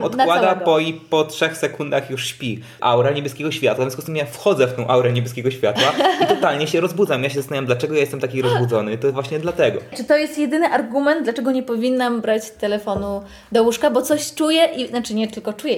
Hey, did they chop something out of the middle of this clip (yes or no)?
yes